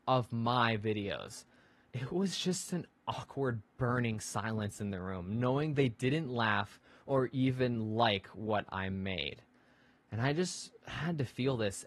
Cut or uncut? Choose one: uncut